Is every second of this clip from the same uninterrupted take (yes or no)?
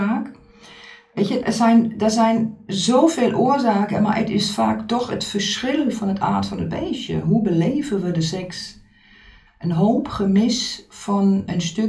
no